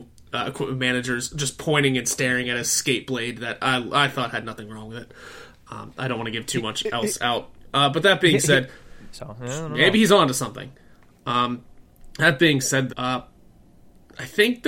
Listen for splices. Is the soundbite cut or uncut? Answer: cut